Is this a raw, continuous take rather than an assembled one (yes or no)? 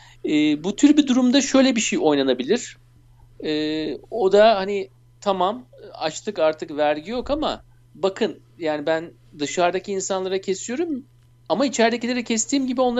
yes